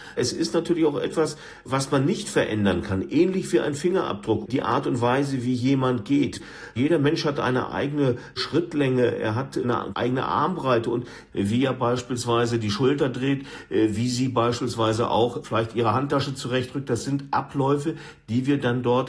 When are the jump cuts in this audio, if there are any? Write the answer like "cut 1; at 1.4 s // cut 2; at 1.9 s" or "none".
none

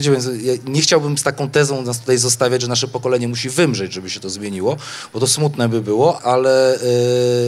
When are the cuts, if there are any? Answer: cut 1; at 6.2 s

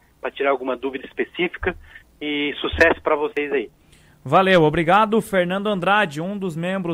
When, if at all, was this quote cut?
cut 1; at 2.0 s

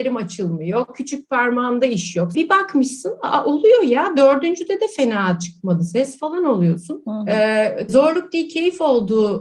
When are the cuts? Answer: cut 1; at 2.3 s // cut 2; at 7.9 s

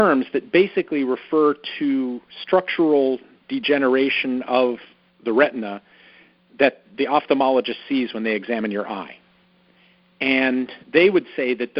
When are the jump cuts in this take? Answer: cut 1; at 10.8 s

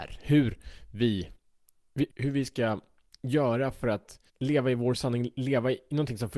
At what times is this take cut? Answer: cut 1; at 2.1 s // cut 2; at 4.3 s

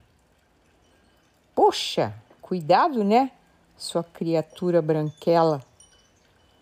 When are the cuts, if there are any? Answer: none

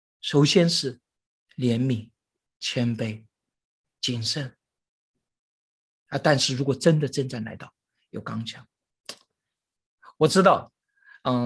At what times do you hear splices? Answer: none

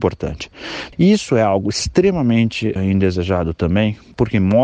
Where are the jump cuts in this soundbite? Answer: cut 1; at 0.9 s // cut 2; at 2.8 s

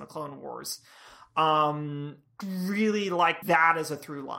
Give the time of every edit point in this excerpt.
cut 1; at 2.4 s // cut 2; at 3.4 s

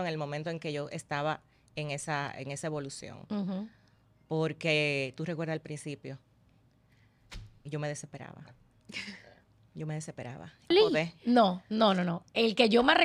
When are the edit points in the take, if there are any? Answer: cut 1; at 10.7 s

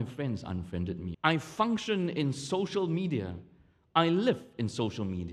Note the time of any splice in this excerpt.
cut 1; at 1.1 s

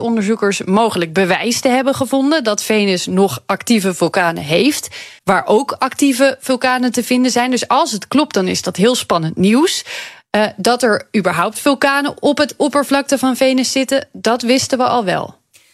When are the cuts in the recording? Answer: cut 1; at 5.2 s

